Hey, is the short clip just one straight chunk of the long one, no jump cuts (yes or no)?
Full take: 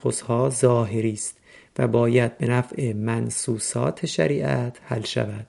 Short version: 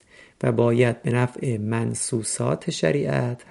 yes